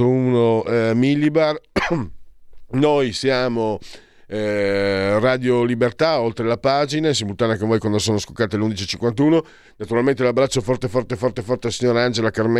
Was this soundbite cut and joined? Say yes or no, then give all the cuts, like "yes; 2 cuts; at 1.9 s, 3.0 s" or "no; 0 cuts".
no; 0 cuts